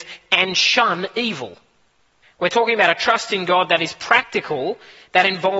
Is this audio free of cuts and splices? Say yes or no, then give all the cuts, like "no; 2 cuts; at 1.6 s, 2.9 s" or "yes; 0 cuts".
no; 1 cut; at 2.2 s